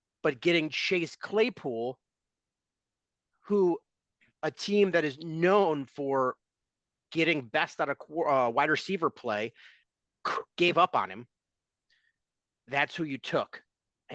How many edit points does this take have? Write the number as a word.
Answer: zero